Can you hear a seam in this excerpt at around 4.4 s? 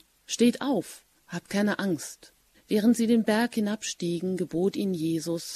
no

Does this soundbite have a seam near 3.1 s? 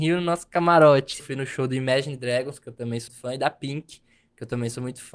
yes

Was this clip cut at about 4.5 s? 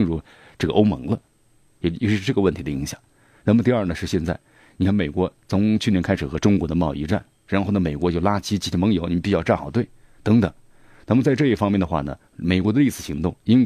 no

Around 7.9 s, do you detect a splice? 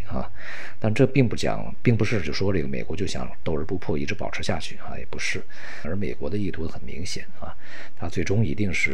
no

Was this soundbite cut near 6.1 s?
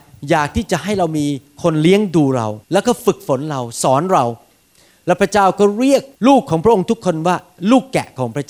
yes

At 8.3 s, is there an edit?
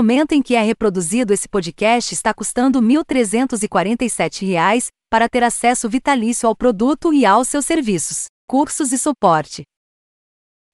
yes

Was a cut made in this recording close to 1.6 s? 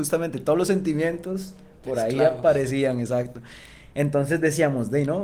no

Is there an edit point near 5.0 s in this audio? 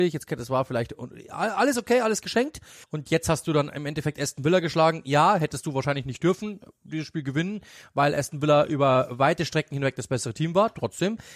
no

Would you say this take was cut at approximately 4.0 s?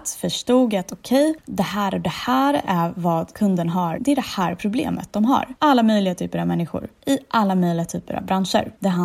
yes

